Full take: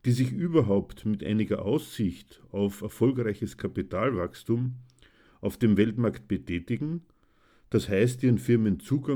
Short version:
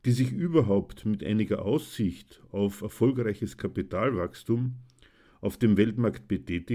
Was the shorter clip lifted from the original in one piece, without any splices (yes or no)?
yes